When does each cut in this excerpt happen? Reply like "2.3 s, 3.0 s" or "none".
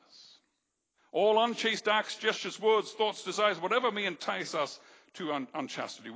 1.0 s